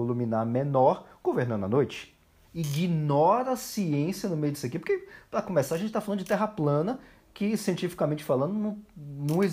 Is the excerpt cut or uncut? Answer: cut